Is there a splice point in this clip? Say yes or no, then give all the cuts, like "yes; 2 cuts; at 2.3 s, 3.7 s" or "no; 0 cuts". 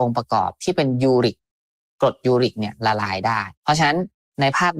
yes; 1 cut; at 3.5 s